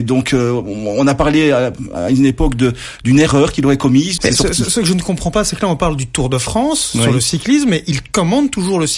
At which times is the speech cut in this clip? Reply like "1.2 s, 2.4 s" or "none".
4.2 s